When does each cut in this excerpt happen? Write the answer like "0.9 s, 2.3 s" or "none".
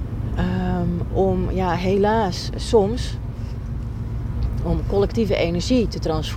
2.5 s